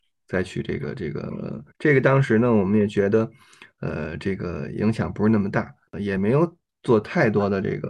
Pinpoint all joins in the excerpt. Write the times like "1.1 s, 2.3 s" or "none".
1.7 s